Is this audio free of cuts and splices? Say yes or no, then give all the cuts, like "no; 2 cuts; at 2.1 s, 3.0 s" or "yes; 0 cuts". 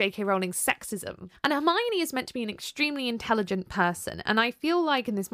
yes; 0 cuts